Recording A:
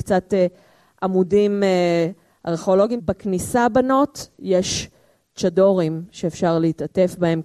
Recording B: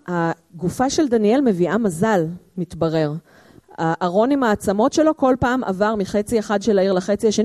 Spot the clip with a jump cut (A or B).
A